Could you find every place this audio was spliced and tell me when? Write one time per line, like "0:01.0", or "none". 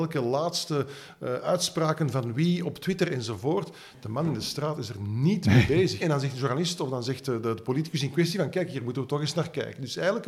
0:06.0